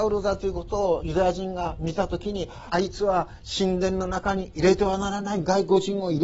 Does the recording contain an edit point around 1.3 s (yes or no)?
no